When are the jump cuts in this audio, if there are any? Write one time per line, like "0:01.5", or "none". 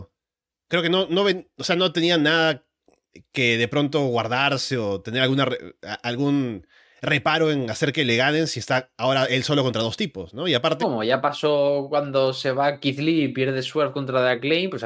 0:10.8